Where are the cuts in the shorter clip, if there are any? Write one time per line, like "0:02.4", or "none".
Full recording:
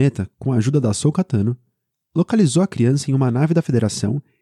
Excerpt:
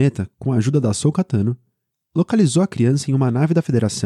none